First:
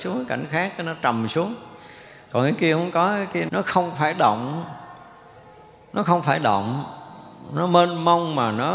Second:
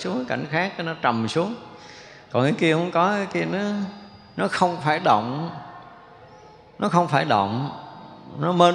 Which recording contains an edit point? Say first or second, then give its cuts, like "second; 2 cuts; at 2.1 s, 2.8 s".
first; 1 cut; at 3.5 s